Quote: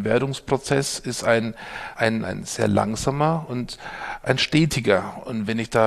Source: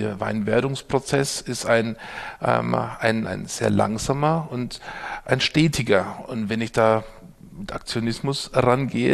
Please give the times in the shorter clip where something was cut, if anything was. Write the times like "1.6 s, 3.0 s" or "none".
2.0 s